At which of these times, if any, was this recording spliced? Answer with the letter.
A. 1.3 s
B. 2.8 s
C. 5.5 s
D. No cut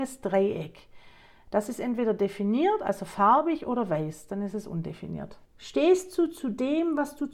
C